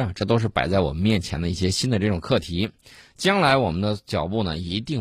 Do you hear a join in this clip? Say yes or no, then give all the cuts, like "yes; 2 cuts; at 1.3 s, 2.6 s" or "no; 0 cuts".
no; 0 cuts